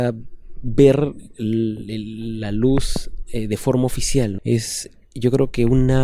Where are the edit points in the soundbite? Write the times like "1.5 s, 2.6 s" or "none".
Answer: 4.4 s